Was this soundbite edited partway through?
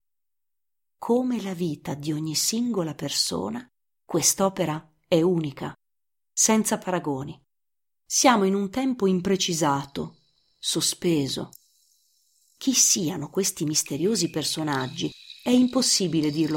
no; 0 cuts

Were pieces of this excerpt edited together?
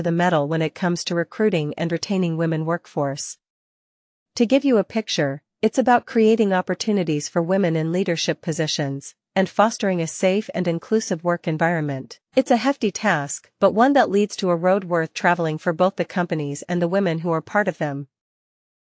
yes; 2 cuts; at 9.2 s, 12.3 s

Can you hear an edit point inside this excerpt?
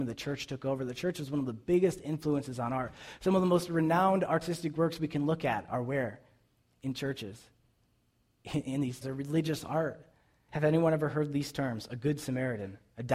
yes; 2 cuts; at 9.0 s, 10.5 s

